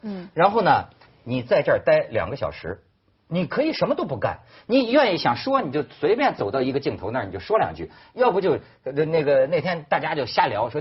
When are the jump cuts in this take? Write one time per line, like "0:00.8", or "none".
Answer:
0:01.1